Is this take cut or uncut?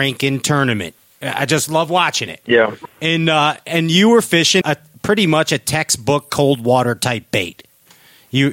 cut